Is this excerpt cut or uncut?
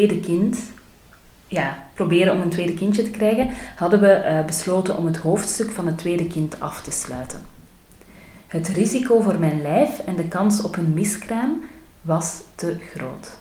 uncut